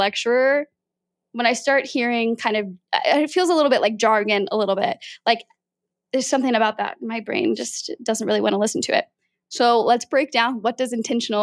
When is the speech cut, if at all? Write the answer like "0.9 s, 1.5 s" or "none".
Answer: none

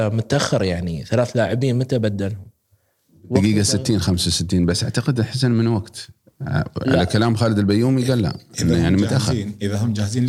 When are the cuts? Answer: none

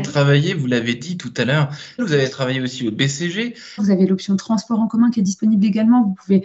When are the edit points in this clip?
2.0 s, 3.8 s

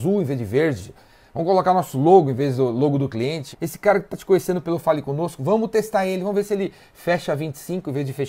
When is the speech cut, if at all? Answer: 3.5 s

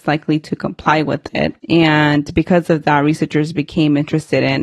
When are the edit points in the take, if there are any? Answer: 1.6 s

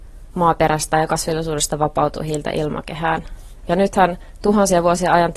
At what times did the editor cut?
3.6 s

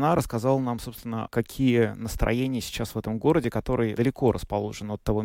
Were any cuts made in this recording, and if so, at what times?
1.3 s, 4.0 s

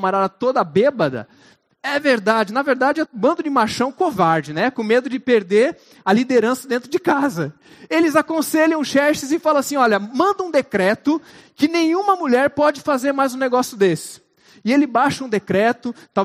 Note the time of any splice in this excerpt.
3.1 s

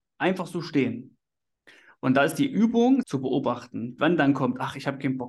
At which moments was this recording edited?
3.0 s

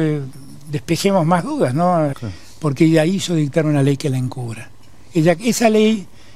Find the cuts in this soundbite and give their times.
2.1 s

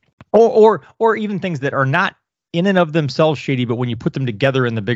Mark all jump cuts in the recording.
none

